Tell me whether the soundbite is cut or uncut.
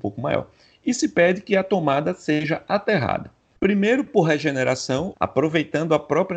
cut